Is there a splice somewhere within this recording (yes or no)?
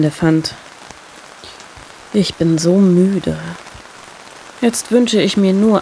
no